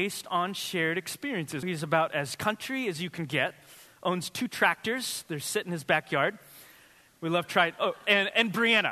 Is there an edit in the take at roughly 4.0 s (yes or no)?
no